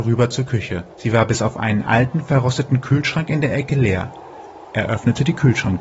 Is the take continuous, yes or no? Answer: no